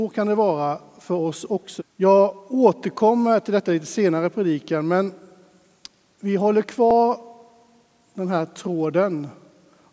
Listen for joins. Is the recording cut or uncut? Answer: cut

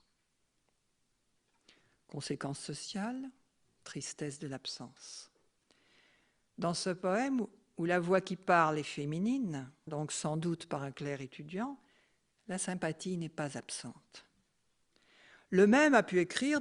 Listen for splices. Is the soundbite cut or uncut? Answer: cut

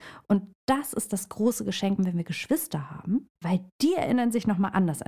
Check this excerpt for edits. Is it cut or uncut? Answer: cut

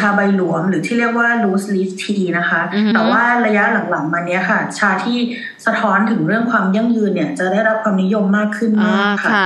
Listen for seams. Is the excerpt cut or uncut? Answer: cut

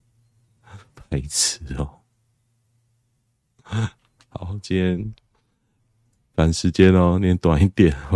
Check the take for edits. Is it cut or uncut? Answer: uncut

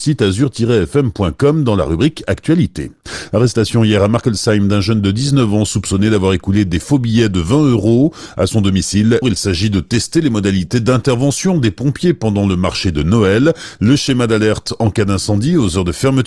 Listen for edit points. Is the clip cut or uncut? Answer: cut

